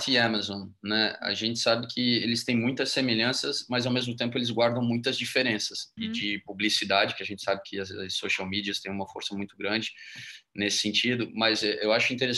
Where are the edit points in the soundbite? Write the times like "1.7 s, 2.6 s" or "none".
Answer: 6.0 s